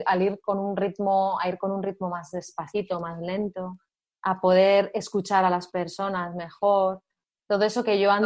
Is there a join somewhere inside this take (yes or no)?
no